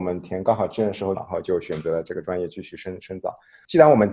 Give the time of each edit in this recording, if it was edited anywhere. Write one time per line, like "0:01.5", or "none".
0:01.1